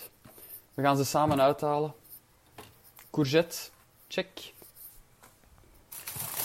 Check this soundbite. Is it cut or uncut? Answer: uncut